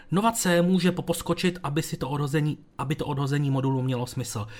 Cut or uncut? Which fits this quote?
cut